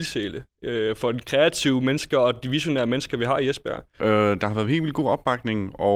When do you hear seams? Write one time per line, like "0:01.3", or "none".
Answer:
0:04.0